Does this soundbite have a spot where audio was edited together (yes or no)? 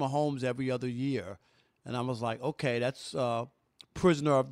no